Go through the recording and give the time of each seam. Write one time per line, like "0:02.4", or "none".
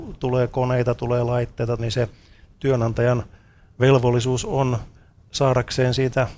0:01.8